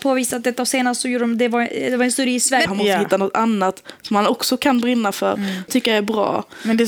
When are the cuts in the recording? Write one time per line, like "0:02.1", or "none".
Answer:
0:02.7
0:05.7